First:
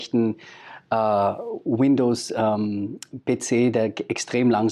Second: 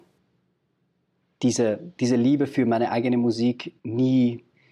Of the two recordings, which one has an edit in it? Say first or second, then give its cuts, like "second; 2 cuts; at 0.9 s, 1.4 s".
second; 1 cut; at 3.8 s